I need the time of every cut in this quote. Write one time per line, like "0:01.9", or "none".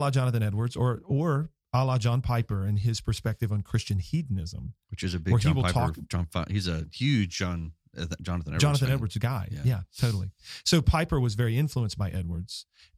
none

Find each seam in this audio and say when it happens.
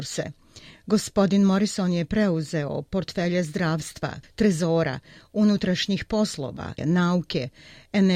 0:04.2
0:06.8

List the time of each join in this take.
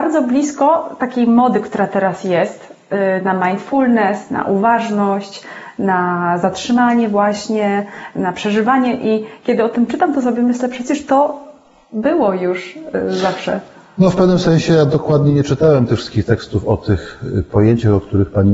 none

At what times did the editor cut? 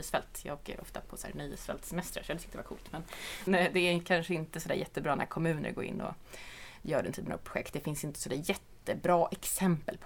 0:03.5

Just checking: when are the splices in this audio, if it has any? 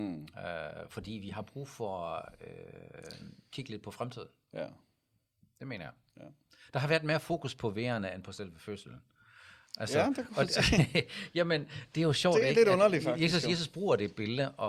none

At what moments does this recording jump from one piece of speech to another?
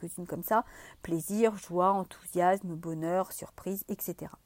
none

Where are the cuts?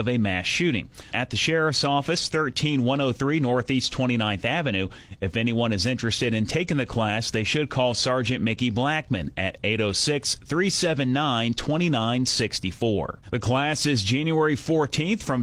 0:01.1
0:13.2

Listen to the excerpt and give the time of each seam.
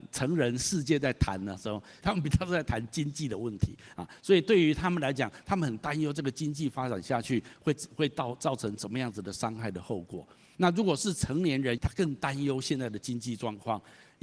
0:02.0
0:10.5
0:11.8

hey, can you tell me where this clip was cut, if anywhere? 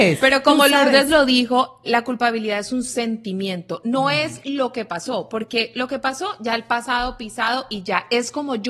0:01.9

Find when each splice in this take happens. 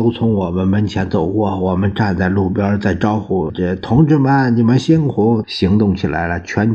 0:03.5
0:05.4

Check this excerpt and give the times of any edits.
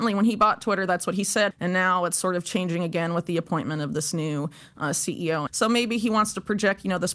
0:01.5
0:05.5

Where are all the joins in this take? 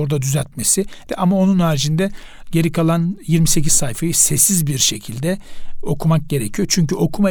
0:01.1

